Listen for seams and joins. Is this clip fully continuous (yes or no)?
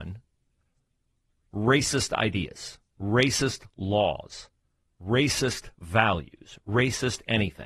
yes